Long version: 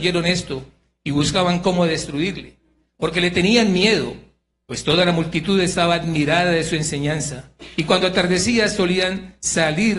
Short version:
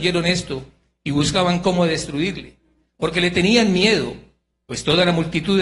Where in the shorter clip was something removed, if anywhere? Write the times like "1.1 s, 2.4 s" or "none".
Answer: none